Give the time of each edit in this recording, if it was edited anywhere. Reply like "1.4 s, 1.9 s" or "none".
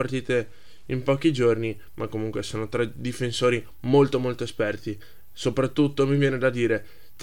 none

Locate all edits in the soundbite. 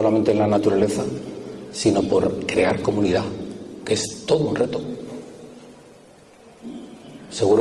none

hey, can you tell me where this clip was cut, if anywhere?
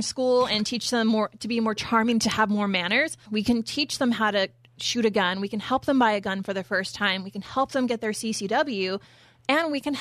3.3 s

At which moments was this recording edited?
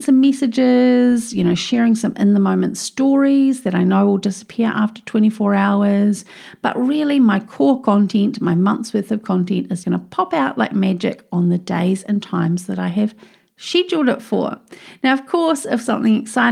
9.8 s

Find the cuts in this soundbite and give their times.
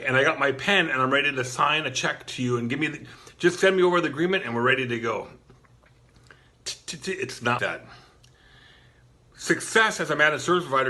7.6 s

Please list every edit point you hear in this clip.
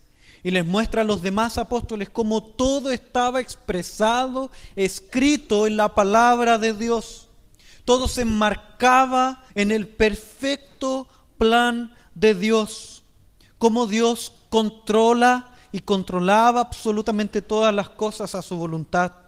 9.5 s

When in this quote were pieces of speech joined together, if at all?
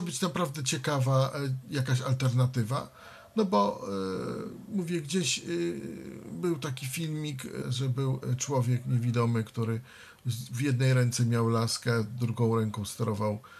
7.6 s

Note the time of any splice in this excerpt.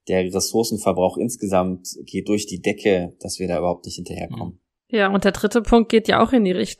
2.3 s

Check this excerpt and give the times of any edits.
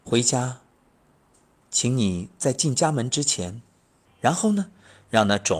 4.0 s

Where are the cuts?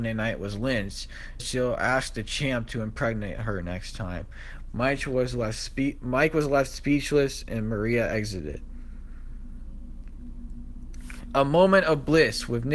1.4 s

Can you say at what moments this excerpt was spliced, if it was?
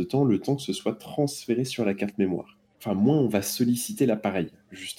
2.7 s

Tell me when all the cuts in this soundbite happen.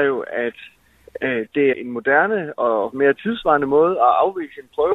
1.7 s

